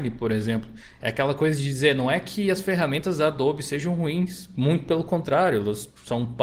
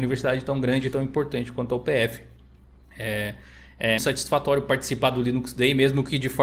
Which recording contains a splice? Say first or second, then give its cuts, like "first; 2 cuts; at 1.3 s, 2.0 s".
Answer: second; 1 cut; at 4.0 s